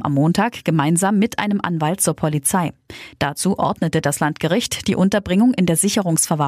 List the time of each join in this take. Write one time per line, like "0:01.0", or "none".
0:03.1